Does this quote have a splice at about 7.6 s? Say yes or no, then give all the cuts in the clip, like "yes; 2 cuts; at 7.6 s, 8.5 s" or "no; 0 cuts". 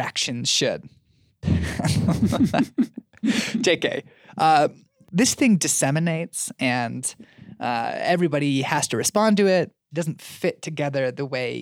no; 2 cuts; at 1.4 s, 9.9 s